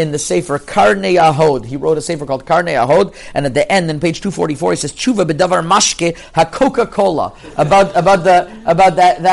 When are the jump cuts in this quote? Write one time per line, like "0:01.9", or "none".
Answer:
none